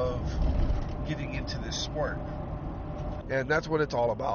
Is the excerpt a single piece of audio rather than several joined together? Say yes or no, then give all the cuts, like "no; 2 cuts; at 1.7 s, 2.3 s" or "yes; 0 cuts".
no; 1 cut; at 3.2 s